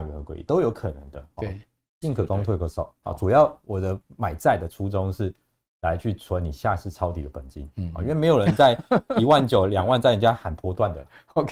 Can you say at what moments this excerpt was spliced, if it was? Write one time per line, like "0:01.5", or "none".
0:02.0